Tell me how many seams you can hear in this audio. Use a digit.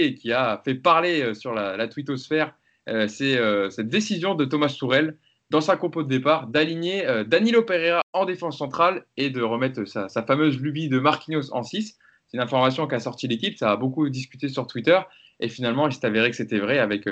0